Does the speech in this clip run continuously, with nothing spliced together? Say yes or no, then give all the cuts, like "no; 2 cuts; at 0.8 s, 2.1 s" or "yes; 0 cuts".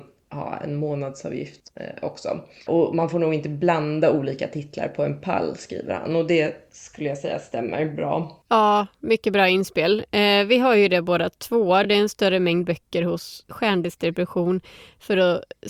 yes; 0 cuts